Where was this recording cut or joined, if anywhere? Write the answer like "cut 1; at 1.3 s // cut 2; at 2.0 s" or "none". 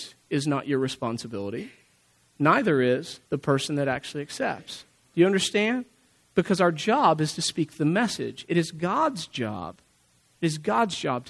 cut 1; at 3.3 s